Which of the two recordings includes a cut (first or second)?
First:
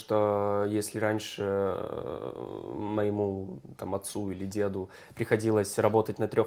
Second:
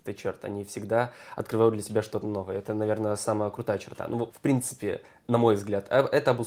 second